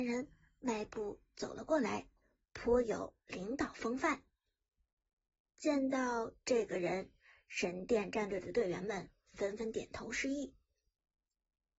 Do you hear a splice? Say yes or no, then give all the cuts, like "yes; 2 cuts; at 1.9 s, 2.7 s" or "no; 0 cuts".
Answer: no; 0 cuts